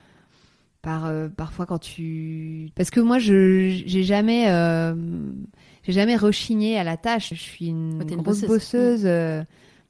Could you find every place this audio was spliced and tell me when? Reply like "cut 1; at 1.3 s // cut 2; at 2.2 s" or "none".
cut 1; at 2.7 s // cut 2; at 7.3 s